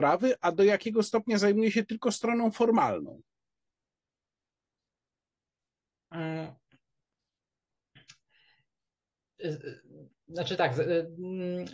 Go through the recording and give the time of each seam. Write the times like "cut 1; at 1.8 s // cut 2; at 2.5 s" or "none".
none